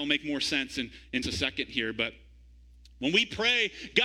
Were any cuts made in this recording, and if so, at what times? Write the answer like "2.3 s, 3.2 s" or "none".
1.2 s